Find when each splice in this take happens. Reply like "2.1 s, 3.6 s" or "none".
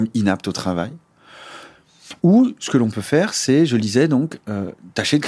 none